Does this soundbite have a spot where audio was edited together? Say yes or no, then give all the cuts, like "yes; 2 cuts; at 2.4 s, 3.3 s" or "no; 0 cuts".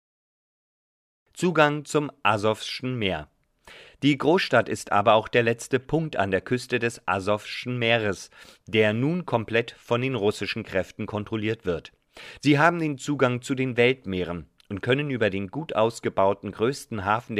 yes; 1 cut; at 12.4 s